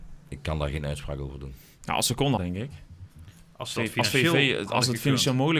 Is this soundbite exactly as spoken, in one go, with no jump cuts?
no; 1 cut; at 2.4 s

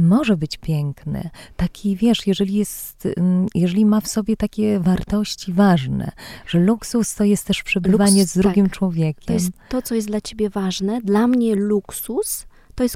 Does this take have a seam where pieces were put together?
no; 0 cuts

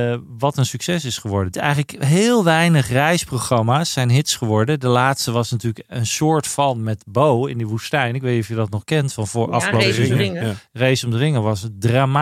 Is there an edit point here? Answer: yes; 1 cut; at 1.5 s

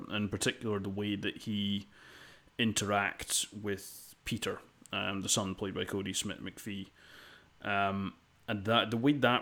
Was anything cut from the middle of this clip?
no; 0 cuts

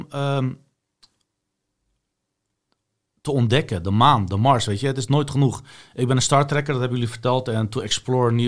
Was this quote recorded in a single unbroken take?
yes; 0 cuts

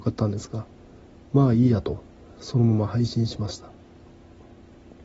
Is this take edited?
no; 0 cuts

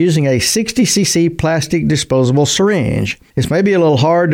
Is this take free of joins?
yes; 0 cuts

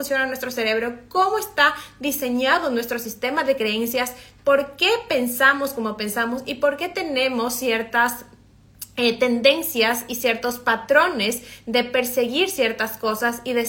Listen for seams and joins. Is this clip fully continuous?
yes; 0 cuts

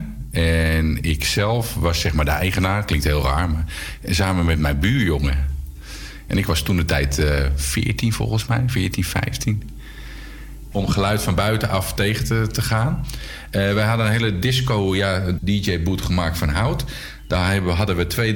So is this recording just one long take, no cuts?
no; 3 cuts; at 6.3 s, 10.7 s, 15.4 s

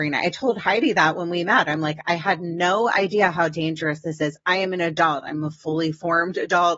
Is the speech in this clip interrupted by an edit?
no; 0 cuts

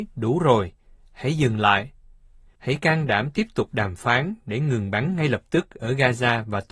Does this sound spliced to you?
no; 0 cuts

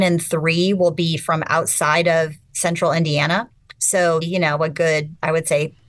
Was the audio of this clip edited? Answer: yes; 1 cut; at 4.2 s

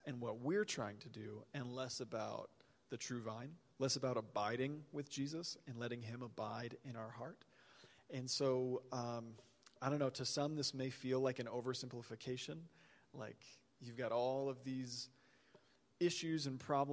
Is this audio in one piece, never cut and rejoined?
yes; 0 cuts

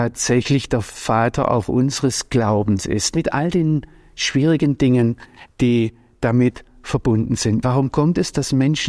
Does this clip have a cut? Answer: yes; 1 cut; at 7.6 s

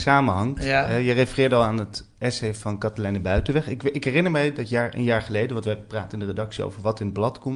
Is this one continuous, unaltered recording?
yes; 0 cuts

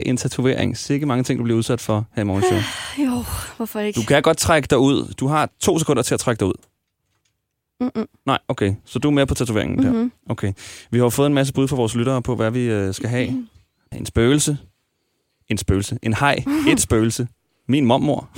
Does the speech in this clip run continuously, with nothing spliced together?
no; 1 cut; at 13.9 s

